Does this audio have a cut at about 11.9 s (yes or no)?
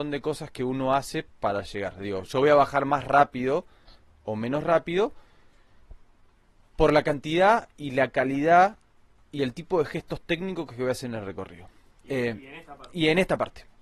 yes